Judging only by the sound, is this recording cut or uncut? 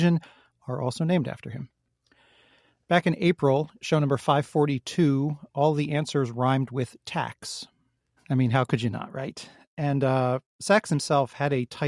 cut